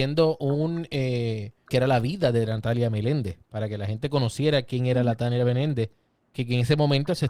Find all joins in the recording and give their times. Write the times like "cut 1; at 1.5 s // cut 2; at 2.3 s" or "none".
cut 1; at 1.6 s